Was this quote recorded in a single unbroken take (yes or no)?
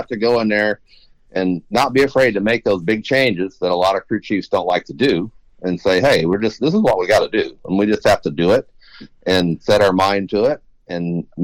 yes